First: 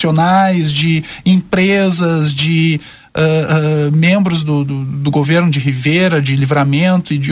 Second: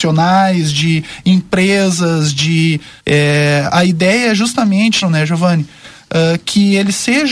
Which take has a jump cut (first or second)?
second